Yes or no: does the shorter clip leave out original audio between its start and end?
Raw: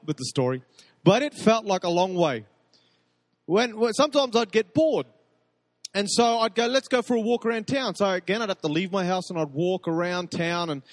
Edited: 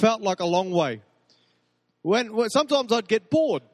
no